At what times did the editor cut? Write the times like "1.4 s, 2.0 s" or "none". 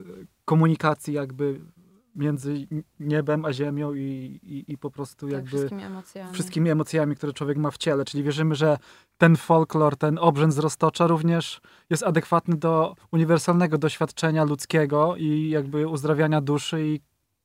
none

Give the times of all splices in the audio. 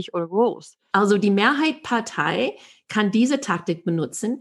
0.9 s

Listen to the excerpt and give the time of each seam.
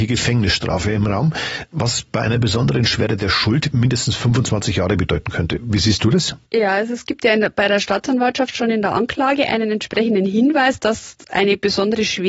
6.4 s

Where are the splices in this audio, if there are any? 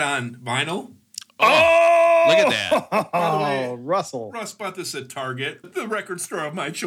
5.6 s

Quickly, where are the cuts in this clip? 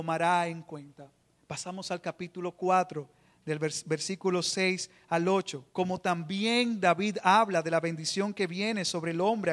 1.4 s, 5.7 s

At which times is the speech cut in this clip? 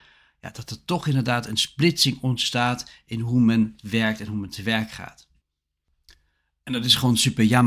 none

